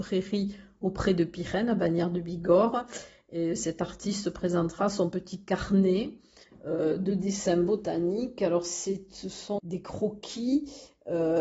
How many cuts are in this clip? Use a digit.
1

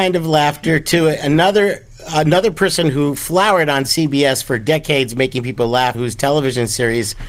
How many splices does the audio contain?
1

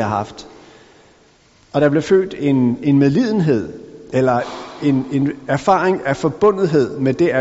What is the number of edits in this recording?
0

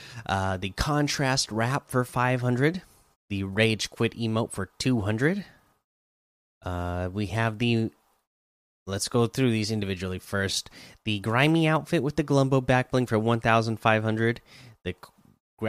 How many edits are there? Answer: 1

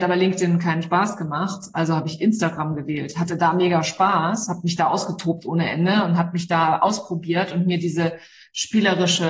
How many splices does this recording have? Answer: 0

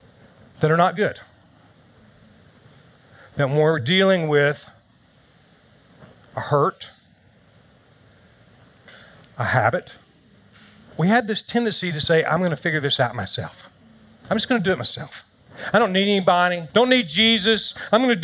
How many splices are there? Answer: 2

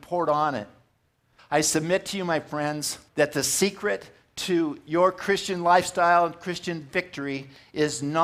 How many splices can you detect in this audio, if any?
2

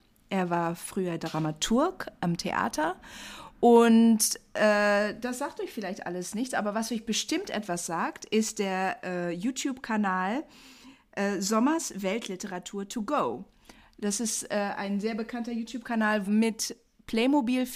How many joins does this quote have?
1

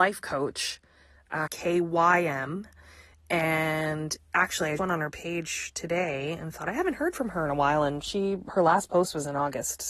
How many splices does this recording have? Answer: 2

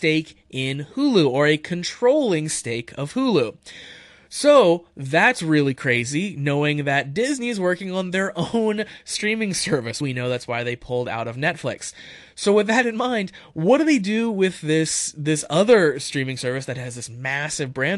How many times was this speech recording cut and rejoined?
1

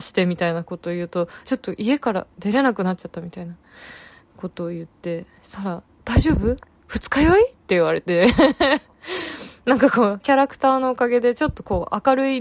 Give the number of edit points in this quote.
2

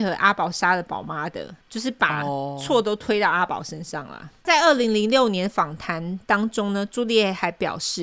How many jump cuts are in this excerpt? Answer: 0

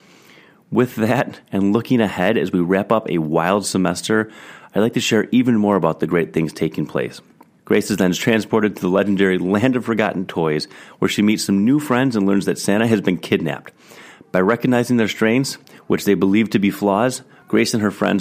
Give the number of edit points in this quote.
1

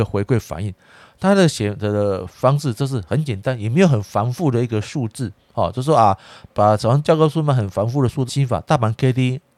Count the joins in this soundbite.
2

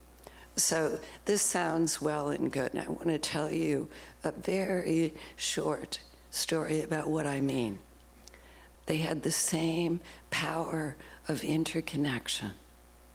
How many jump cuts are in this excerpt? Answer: 1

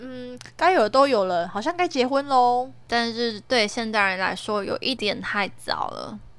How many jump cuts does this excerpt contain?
1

